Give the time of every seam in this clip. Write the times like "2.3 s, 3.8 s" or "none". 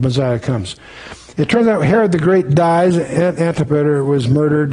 1.3 s, 3.4 s